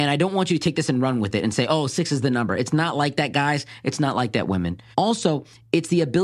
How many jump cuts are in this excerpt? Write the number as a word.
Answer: one